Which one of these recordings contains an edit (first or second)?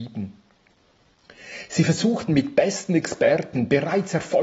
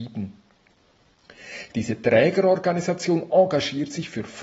second